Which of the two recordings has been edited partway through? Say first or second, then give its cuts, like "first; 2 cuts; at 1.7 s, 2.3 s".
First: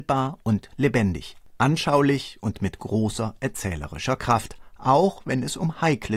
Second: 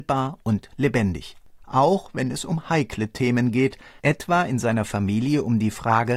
second; 1 cut; at 1.6 s